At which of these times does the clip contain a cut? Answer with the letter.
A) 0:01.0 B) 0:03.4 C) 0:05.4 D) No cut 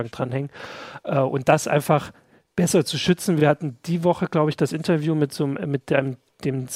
D